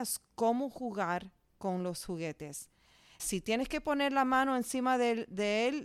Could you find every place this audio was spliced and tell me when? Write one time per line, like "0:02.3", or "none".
0:03.2